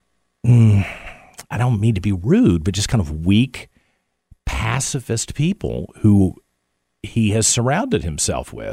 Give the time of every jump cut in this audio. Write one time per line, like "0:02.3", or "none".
0:01.5